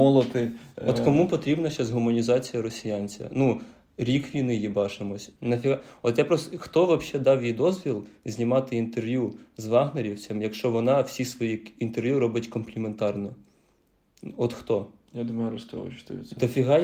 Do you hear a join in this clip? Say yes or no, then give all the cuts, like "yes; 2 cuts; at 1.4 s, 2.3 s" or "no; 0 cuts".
yes; 1 cut; at 5.4 s